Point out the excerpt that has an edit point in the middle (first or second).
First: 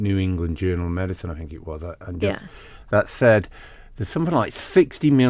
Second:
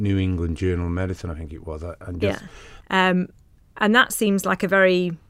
second